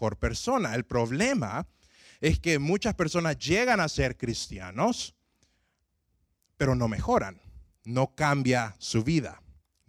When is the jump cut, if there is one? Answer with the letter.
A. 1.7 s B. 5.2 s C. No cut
C